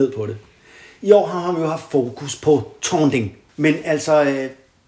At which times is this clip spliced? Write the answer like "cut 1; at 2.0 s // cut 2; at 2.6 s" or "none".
cut 1; at 3.5 s